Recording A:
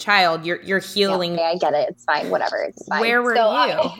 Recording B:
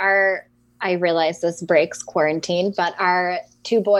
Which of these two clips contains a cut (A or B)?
A